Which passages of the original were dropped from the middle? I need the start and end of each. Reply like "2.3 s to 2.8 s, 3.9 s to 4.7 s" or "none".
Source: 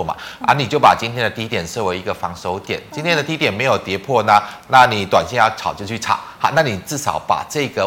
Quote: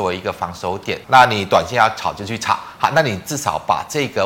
2.9 s to 4.6 s